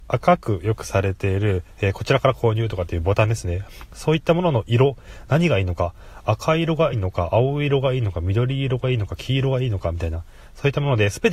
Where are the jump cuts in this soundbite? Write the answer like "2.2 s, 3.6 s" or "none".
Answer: 6.9 s